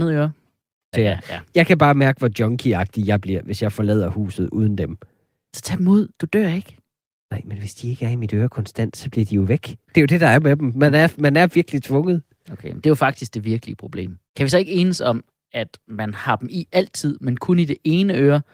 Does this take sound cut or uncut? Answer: cut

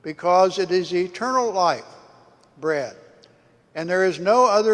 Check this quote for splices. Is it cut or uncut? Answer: uncut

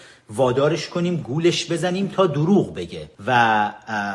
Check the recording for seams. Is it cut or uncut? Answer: cut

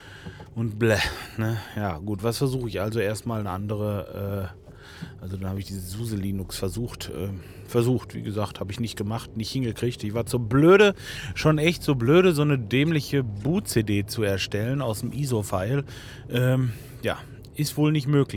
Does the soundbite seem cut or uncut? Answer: uncut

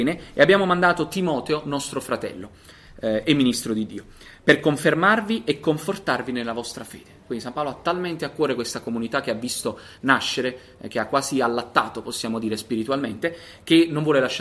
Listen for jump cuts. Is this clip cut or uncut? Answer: uncut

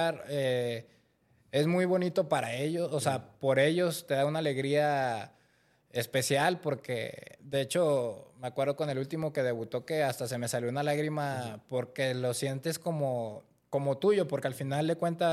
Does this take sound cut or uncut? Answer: uncut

